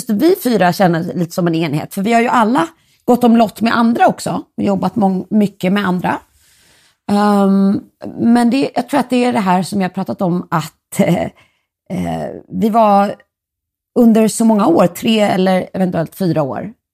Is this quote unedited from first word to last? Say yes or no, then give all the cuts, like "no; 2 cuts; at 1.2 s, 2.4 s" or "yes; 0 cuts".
yes; 0 cuts